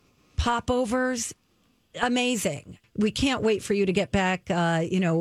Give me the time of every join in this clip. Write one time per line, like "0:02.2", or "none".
0:02.8

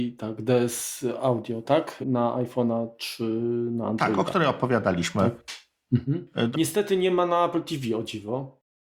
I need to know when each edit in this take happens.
0:06.5

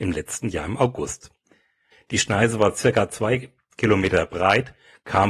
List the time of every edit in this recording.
0:01.9

